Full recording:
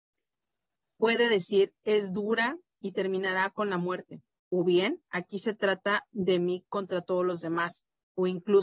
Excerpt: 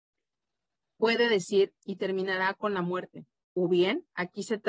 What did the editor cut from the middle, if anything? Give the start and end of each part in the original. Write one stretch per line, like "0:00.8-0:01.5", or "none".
0:01.8-0:02.7